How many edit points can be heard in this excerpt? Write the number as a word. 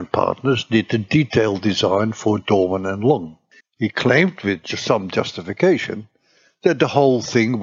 one